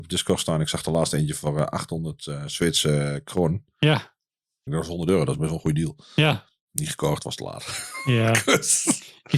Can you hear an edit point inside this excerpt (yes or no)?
yes